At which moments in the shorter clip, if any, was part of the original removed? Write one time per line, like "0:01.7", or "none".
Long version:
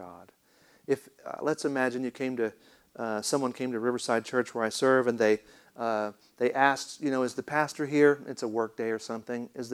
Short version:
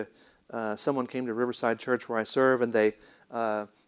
none